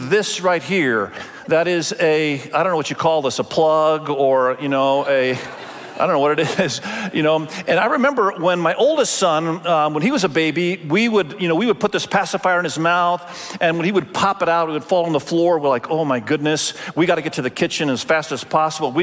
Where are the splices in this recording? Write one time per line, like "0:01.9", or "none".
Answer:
none